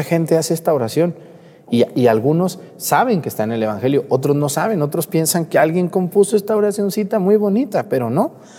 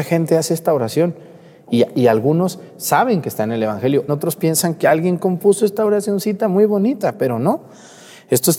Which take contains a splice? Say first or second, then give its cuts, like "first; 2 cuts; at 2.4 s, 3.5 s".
second; 1 cut; at 4.1 s